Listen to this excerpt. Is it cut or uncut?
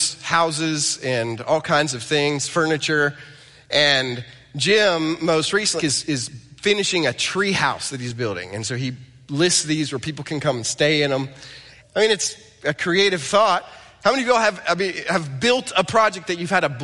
cut